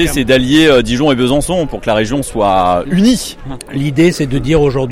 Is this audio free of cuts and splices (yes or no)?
yes